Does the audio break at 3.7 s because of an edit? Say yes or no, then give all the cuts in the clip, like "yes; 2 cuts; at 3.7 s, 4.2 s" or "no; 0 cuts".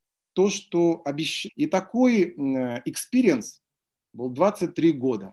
no; 1 cut; at 1.5 s